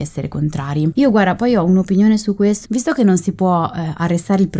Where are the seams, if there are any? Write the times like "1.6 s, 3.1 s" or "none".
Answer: 1.0 s, 2.7 s